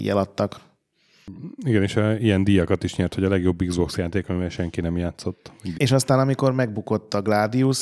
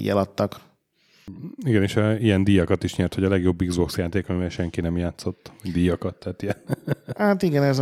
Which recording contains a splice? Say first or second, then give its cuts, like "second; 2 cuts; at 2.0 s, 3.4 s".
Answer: first; 1 cut; at 5.7 s